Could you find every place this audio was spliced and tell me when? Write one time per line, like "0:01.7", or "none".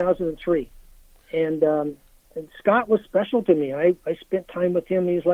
0:02.3